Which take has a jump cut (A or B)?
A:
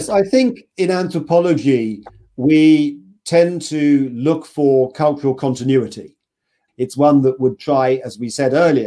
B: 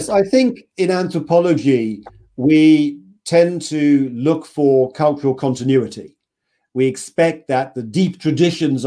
A